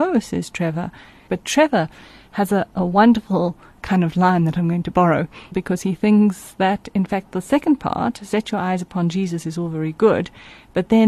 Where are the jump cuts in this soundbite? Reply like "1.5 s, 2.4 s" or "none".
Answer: 1.3 s, 5.5 s